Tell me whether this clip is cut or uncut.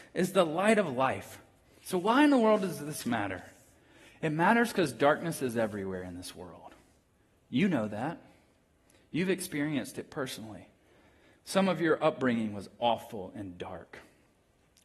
uncut